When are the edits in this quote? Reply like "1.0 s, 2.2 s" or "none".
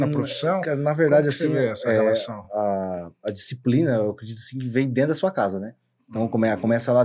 none